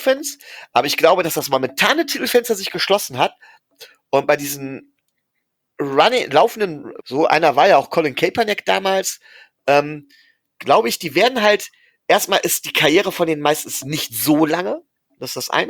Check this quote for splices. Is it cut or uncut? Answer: cut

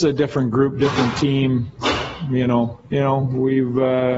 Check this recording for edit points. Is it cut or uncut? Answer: cut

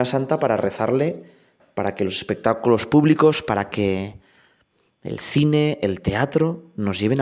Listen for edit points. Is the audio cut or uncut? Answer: uncut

